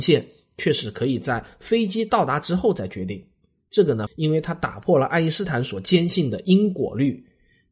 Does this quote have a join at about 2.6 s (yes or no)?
no